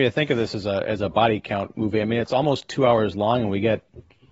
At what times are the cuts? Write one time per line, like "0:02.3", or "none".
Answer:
none